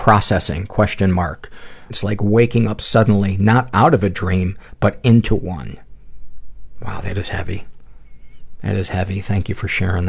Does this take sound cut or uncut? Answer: cut